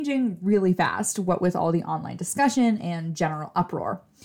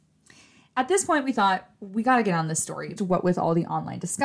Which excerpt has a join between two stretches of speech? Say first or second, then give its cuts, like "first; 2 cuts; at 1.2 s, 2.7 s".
second; 1 cut; at 3.0 s